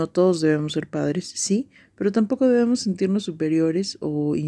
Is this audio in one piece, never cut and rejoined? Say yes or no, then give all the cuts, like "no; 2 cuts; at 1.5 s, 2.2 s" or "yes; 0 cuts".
yes; 0 cuts